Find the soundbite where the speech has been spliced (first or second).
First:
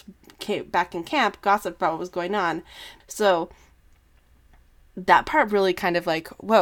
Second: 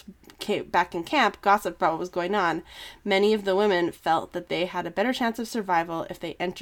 first